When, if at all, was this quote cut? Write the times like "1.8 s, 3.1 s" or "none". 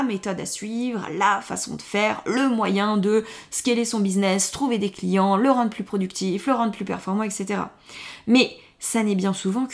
none